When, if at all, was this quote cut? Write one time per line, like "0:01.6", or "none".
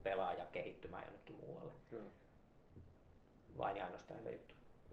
none